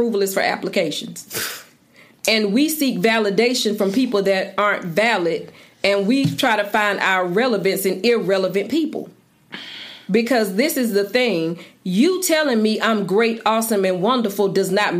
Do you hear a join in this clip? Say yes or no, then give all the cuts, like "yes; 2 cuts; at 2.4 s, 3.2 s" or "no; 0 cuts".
no; 0 cuts